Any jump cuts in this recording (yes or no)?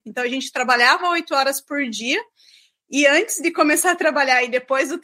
no